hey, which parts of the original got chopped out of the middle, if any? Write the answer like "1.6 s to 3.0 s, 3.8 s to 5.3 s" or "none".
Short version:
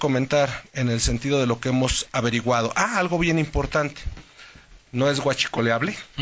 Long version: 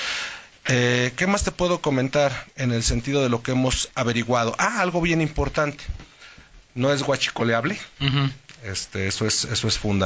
none